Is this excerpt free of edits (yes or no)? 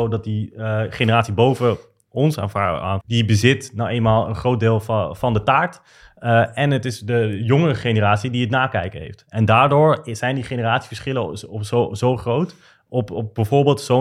no